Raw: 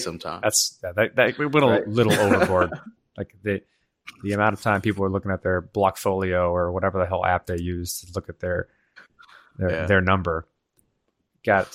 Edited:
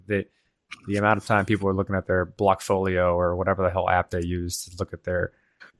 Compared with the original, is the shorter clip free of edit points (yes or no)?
yes